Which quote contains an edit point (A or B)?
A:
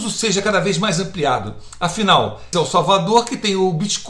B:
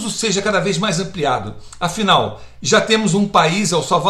A